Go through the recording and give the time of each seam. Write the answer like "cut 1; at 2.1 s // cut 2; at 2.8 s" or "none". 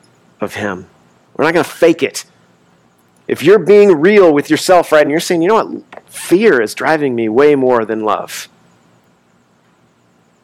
cut 1; at 1.3 s // cut 2; at 5.0 s